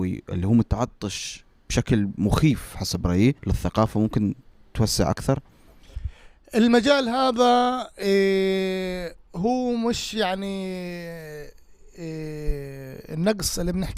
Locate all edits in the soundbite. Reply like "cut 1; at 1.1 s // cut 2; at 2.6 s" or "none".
cut 1; at 3.4 s